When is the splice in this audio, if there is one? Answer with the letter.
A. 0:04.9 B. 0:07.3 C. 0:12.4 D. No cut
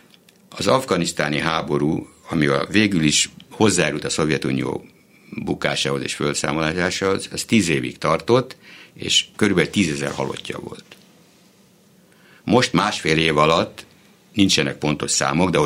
D